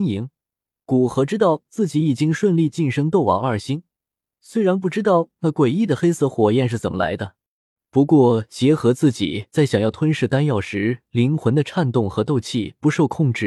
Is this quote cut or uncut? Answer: uncut